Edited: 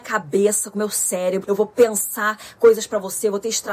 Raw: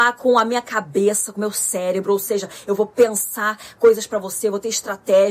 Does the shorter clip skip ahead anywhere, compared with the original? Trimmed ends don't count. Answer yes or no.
yes